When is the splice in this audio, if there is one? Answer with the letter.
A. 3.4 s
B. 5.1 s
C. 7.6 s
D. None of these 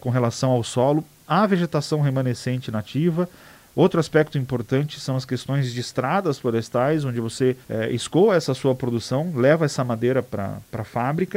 C